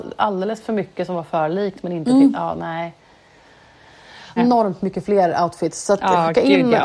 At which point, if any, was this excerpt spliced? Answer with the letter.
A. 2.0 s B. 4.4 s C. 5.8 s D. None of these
B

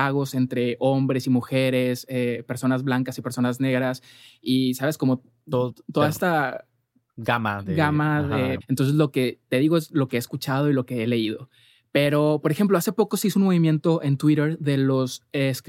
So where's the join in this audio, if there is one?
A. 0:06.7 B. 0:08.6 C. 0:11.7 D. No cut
B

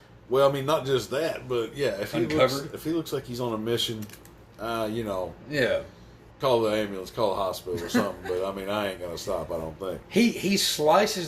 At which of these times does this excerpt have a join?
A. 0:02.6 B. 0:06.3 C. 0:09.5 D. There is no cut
B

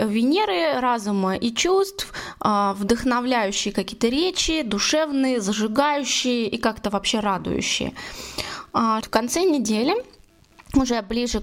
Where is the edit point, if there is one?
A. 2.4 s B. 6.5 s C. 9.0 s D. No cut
C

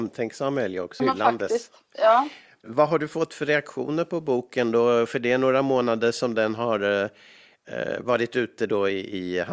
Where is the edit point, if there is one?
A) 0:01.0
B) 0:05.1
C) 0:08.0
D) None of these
A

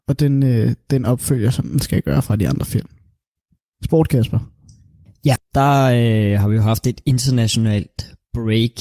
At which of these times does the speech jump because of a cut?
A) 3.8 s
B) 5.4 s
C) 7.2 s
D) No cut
B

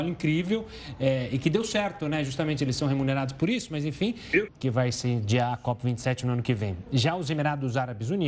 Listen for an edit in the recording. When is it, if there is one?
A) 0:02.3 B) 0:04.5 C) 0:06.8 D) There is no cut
B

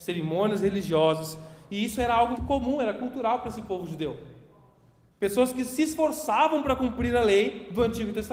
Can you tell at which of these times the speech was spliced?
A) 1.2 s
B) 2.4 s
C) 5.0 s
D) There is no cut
B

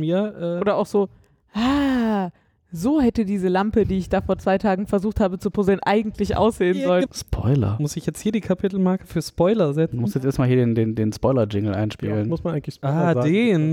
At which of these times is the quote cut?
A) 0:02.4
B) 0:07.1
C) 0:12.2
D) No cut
B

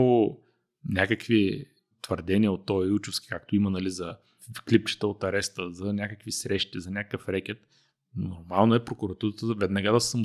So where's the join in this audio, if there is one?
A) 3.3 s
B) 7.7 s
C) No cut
C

